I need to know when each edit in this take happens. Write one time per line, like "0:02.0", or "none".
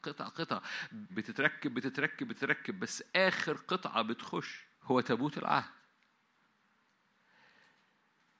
0:01.1
0:04.7